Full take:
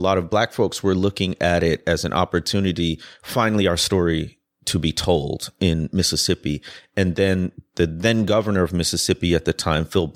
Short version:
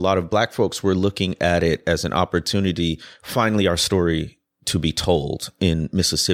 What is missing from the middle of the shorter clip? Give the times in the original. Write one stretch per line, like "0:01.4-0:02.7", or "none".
none